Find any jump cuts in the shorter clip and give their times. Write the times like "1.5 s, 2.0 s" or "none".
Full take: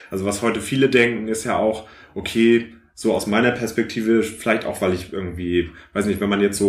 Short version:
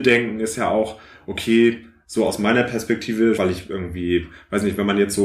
3.4 s